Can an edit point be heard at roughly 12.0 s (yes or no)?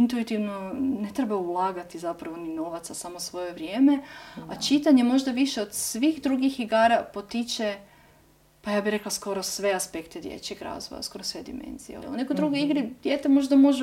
yes